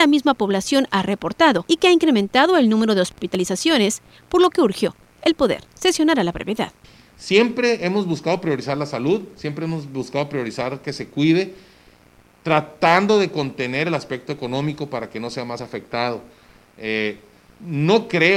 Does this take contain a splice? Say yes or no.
no